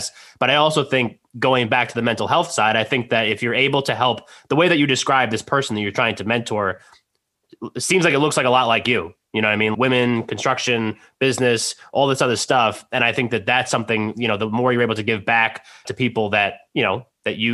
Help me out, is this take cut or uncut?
cut